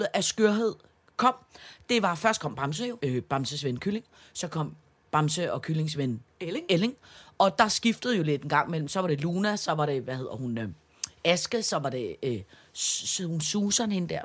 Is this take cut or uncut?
cut